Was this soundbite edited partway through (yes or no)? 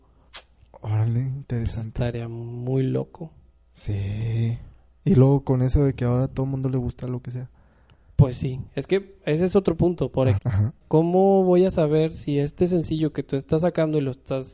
yes